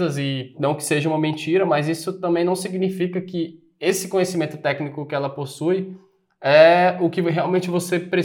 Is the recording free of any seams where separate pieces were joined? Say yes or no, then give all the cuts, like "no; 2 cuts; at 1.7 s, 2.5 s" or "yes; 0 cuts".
yes; 0 cuts